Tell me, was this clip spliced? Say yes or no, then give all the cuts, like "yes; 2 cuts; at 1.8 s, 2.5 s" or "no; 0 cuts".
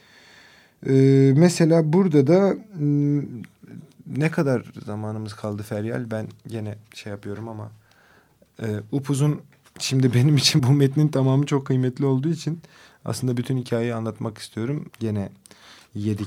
yes; 2 cuts; at 10.6 s, 14.9 s